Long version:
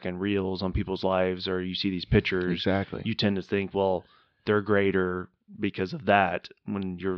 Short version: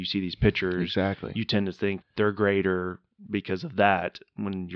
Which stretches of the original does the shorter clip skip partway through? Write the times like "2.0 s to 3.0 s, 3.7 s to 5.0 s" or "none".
3.7 s to 4.3 s